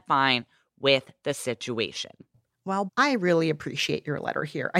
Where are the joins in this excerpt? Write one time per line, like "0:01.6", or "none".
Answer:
0:02.9